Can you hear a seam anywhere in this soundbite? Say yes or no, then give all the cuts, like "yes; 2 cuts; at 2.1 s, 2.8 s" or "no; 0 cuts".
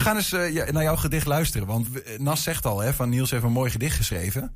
yes; 1 cut; at 1.9 s